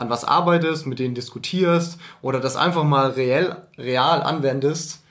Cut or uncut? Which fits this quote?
uncut